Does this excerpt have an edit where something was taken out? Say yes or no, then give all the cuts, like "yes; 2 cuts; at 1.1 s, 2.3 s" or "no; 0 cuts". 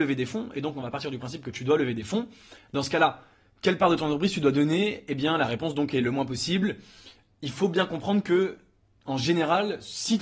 no; 0 cuts